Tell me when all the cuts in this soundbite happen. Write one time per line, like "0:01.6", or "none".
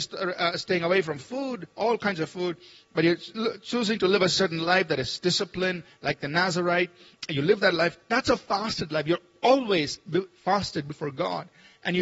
none